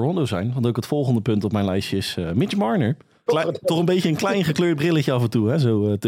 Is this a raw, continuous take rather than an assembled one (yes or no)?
no